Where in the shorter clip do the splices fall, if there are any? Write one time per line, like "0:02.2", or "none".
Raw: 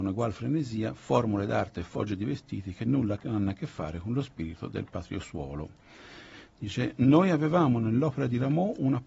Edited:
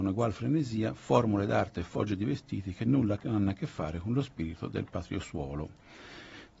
none